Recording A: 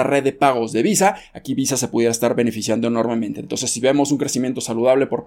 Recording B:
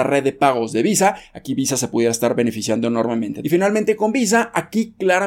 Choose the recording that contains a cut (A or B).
B